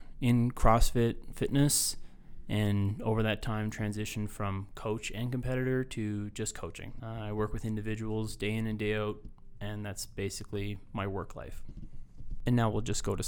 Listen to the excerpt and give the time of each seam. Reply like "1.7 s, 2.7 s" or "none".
7.0 s